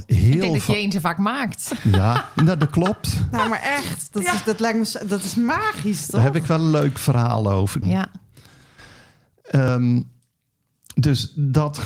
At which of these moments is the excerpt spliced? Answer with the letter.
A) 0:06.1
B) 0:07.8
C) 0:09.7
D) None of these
B